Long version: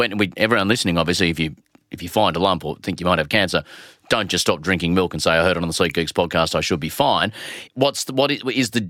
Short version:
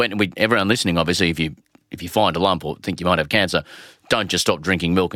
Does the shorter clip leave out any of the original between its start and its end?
no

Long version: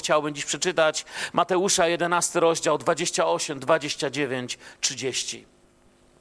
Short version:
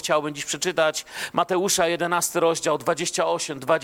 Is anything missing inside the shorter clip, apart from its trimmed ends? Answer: no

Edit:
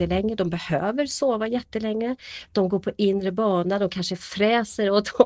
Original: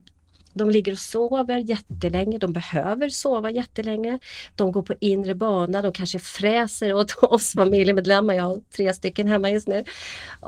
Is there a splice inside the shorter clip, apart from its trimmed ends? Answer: no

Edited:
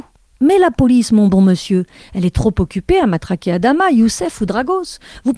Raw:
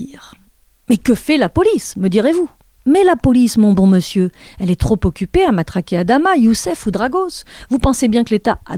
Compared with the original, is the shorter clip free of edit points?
yes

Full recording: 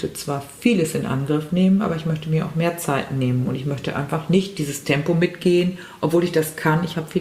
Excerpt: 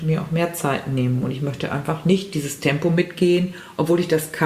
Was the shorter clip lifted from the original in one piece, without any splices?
yes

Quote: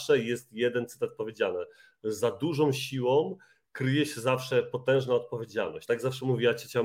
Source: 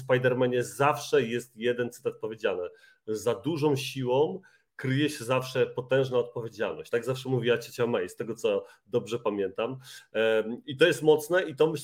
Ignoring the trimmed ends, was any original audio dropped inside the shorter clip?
no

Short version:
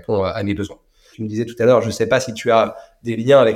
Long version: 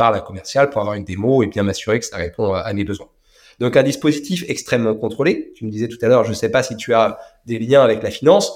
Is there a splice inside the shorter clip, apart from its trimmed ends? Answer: yes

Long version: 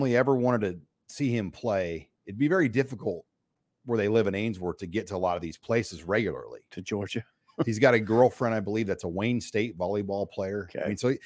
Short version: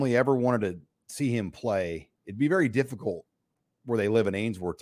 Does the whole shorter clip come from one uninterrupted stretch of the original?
yes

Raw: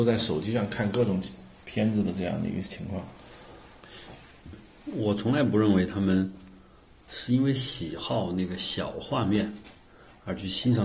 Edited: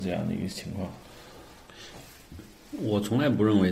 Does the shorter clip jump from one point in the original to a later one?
no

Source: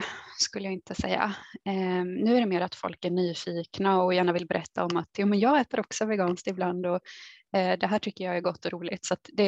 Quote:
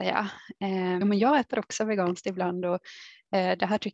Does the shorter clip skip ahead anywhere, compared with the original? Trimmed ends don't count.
yes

